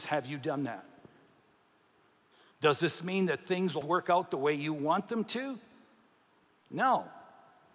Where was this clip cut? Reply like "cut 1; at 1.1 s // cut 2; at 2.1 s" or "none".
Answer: cut 1; at 2.5 s // cut 2; at 3.8 s